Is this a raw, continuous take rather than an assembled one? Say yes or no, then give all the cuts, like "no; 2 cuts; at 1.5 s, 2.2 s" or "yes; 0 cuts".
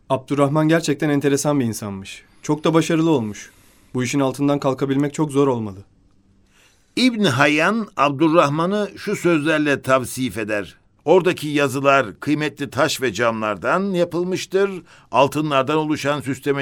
no; 1 cut; at 11.0 s